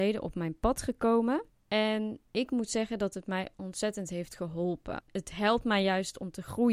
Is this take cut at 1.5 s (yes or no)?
yes